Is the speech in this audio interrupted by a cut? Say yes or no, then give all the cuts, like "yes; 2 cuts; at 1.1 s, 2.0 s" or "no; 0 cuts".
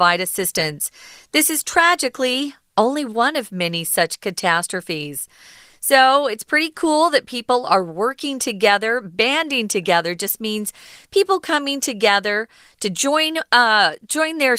no; 0 cuts